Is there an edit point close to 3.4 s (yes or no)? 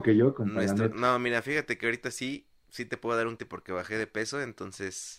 yes